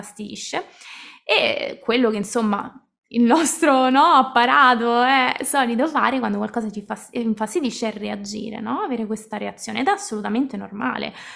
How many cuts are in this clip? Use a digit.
0